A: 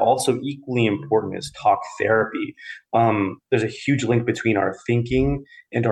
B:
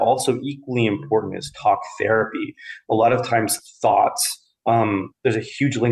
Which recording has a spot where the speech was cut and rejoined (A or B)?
A